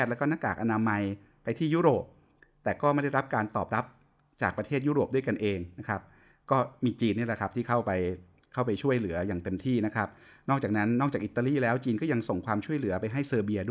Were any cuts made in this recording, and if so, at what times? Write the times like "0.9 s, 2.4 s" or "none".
none